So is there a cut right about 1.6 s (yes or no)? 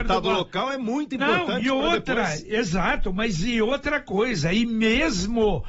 no